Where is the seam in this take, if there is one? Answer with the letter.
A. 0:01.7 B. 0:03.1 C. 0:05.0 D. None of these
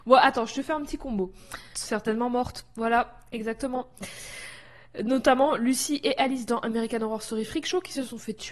A